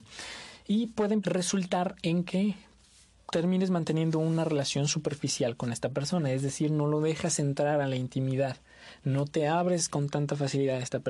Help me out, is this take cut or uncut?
cut